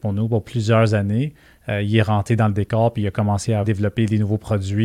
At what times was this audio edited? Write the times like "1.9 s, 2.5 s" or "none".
3.6 s